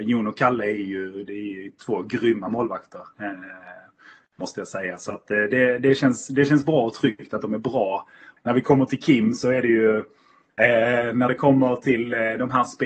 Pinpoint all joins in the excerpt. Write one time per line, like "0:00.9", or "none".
0:08.4
0:10.6

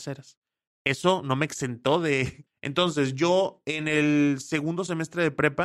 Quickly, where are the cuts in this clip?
0:02.5

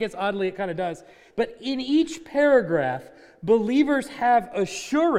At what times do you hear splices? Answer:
0:01.3

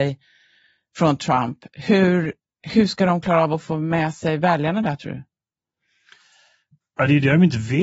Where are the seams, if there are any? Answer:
0:02.6

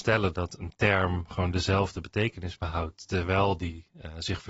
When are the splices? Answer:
none

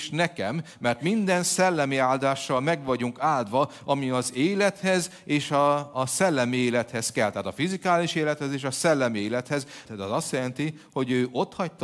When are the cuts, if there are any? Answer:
0:09.8

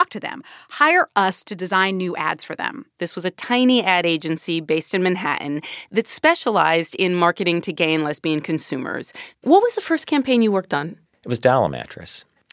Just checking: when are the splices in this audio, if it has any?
0:03.0
0:09.3

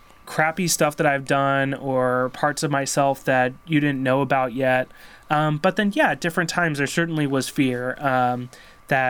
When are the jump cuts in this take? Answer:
0:05.2

